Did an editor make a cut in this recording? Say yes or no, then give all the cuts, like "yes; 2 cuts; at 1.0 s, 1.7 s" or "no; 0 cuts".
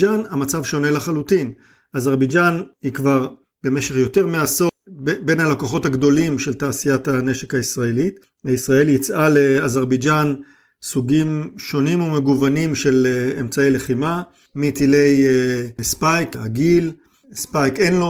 no; 0 cuts